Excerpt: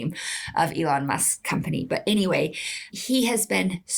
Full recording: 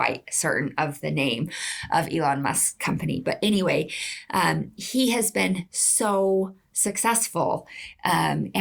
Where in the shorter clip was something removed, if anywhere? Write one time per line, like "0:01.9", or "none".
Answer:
0:02.9